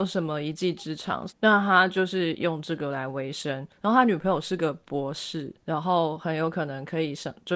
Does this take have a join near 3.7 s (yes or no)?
no